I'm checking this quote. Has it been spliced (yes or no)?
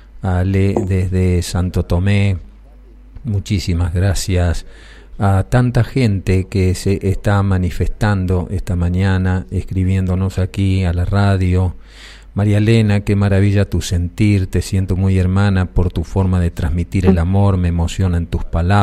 no